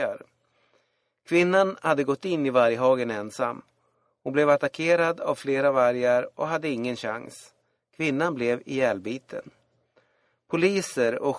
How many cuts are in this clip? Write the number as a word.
zero